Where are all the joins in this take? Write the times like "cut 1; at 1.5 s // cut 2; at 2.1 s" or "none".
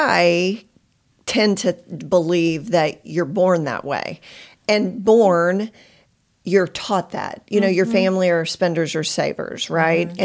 none

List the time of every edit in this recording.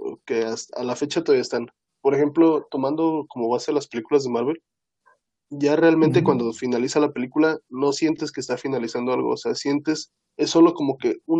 none

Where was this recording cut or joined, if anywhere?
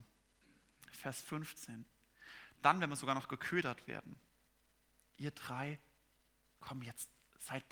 cut 1; at 2.5 s

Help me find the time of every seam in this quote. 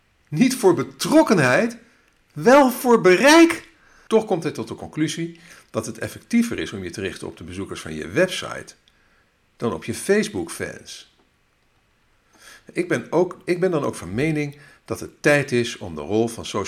cut 1; at 4.1 s

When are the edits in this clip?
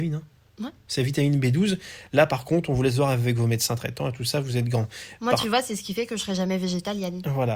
none

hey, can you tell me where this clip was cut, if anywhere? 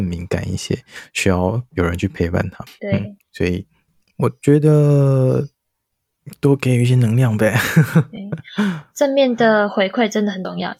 none

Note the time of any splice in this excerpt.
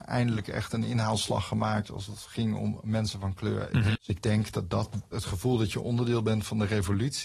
cut 1; at 4.0 s // cut 2; at 5.1 s

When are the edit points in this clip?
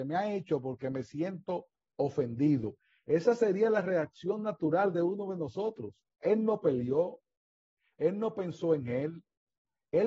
cut 1; at 6.2 s

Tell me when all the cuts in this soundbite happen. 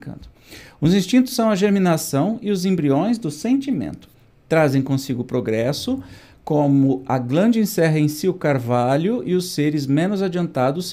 none

